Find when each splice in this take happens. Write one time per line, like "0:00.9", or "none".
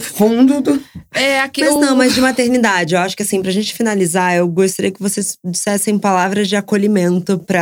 none